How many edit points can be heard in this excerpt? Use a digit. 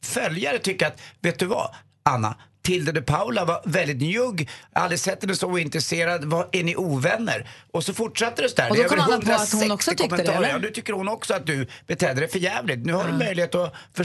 0